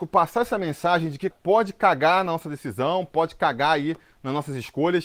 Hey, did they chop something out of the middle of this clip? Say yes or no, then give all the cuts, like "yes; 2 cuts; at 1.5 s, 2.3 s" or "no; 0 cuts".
yes; 1 cut; at 1.3 s